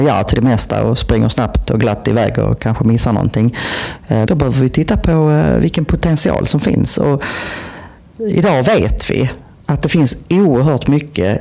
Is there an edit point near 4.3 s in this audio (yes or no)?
yes